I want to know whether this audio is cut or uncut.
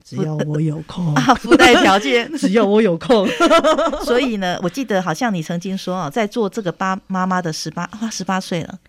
uncut